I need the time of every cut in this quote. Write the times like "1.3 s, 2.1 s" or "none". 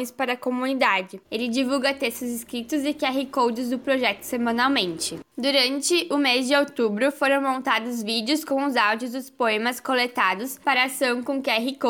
1.2 s